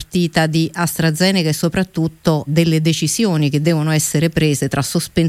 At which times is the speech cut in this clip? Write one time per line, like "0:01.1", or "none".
0:02.5